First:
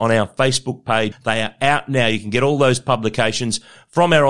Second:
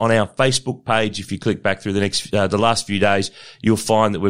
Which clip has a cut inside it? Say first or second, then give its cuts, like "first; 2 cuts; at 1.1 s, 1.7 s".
first; 1 cut; at 1.1 s